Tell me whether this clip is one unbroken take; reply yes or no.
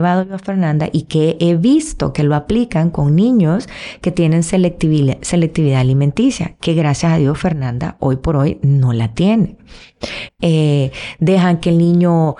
no